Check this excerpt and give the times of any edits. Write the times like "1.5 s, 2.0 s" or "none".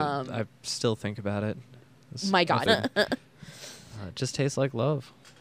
2.7 s